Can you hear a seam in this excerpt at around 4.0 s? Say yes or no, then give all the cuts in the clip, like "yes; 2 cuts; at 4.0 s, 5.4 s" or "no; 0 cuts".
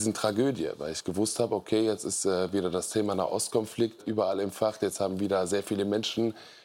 yes; 1 cut; at 4.0 s